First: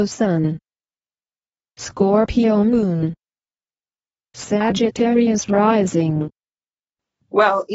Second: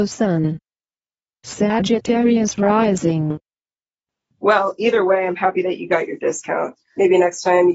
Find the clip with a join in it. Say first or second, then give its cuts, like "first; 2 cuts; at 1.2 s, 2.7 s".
second; 1 cut; at 1.2 s